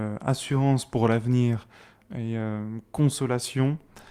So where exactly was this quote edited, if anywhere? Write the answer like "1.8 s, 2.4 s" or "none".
none